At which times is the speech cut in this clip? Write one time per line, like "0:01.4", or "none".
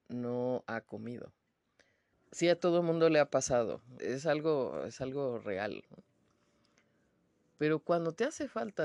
0:02.1
0:04.0